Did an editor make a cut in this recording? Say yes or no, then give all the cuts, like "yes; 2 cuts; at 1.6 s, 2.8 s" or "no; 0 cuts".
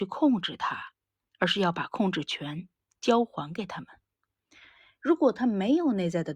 yes; 1 cut; at 5.0 s